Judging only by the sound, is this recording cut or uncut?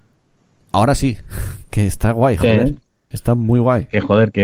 cut